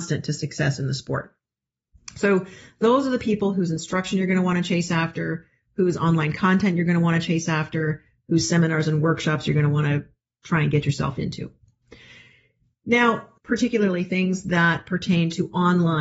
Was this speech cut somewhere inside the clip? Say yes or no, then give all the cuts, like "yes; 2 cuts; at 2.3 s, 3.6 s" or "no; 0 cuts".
yes; 1 cut; at 13.4 s